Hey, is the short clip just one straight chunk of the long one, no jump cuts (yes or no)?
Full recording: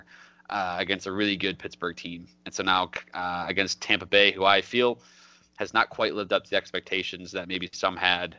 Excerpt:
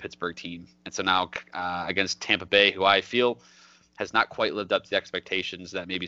yes